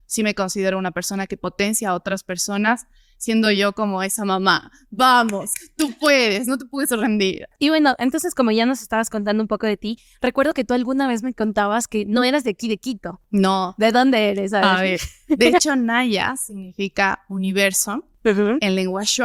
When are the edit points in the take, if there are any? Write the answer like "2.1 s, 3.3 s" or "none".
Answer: none